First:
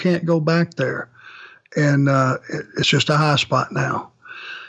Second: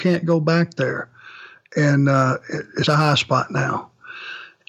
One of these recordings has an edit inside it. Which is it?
second; 1 cut; at 2.8 s

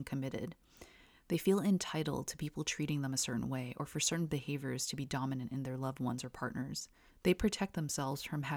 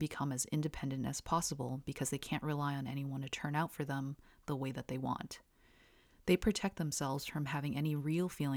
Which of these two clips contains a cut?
first; 1 cut; at 7.1 s

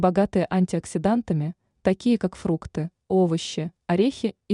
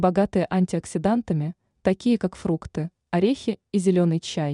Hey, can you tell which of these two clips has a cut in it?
second; 1 cut; at 3.1 s

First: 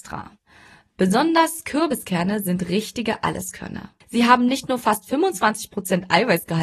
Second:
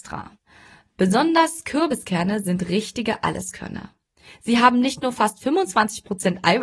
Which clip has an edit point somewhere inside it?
first; 1 cut; at 4.0 s

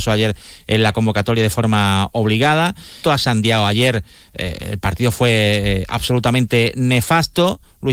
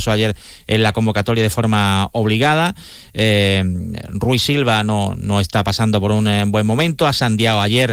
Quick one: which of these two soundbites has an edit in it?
first; 1 cut; at 3.0 s

